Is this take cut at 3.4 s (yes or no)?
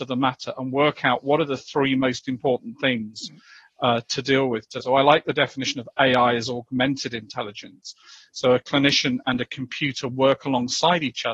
no